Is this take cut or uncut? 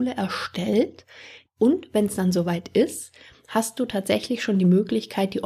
cut